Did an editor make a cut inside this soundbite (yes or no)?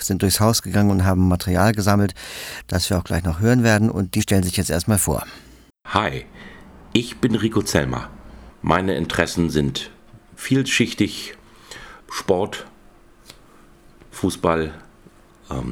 yes